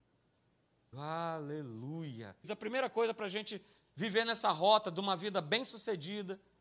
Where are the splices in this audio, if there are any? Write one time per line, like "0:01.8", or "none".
0:00.9
0:02.4